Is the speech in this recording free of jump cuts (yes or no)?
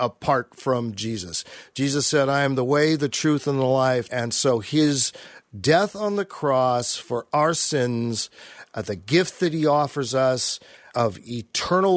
no